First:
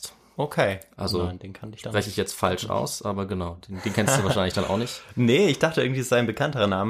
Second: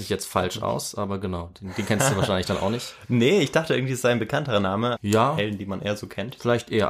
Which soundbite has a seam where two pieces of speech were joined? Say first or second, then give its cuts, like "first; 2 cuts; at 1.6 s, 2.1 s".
second; 1 cut; at 5.0 s